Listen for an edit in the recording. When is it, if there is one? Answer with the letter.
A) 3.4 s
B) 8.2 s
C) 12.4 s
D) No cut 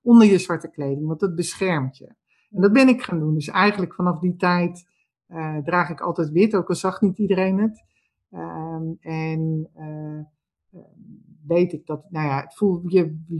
D